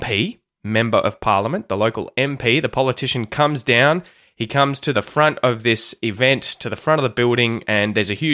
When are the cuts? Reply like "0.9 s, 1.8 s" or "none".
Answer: 4.9 s

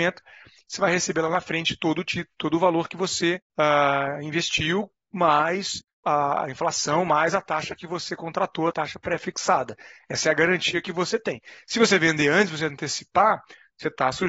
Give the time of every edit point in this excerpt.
none

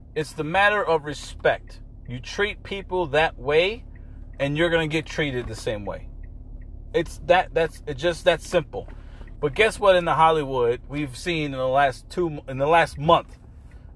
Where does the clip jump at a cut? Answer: 9.4 s

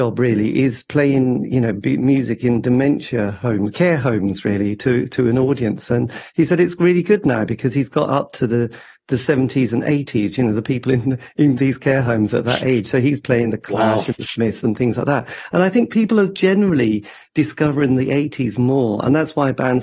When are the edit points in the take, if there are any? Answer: none

